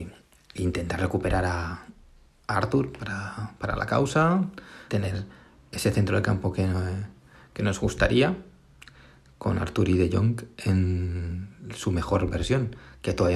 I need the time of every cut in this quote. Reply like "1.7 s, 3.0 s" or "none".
4.9 s